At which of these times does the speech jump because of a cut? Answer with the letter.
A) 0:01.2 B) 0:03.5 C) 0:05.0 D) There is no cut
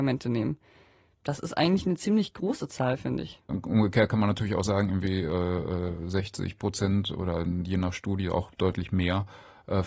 B